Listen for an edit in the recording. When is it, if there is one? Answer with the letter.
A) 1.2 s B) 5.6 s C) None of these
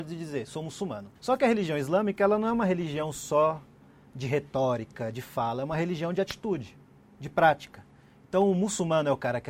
A